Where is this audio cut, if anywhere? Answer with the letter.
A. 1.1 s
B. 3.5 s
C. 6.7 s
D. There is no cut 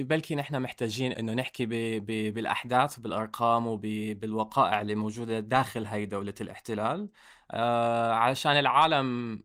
A